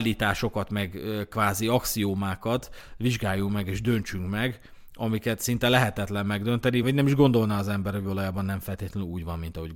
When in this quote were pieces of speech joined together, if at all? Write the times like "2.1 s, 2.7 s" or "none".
6.8 s